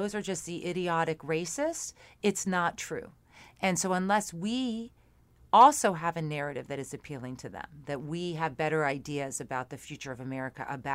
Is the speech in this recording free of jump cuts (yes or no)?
yes